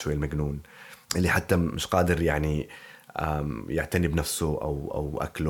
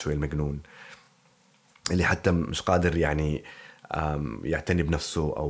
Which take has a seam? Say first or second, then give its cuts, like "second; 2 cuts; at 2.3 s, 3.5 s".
first; 1 cut; at 1.0 s